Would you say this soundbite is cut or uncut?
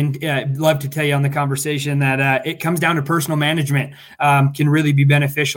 cut